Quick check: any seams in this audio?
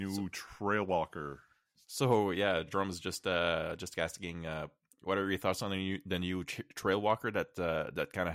no; 0 cuts

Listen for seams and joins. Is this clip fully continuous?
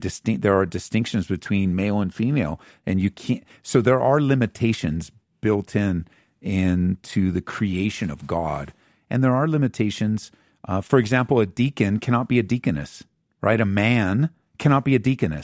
yes; 0 cuts

